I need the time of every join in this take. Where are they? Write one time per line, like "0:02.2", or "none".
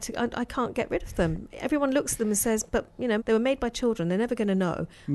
0:03.2